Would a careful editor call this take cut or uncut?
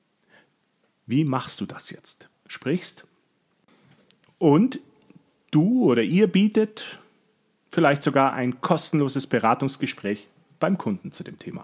cut